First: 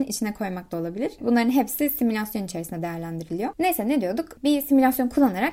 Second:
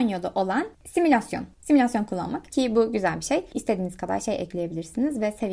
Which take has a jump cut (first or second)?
second